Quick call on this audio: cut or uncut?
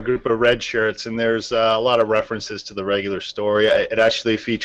uncut